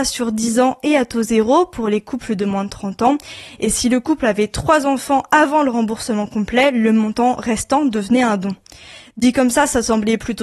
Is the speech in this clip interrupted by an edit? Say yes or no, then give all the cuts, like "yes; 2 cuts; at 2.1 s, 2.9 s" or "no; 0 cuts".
no; 0 cuts